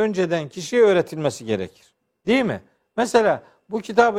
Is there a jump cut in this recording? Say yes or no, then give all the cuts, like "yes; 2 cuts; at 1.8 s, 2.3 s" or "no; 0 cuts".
yes; 1 cut; at 2.7 s